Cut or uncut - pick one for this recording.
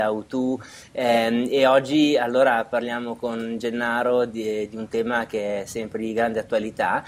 uncut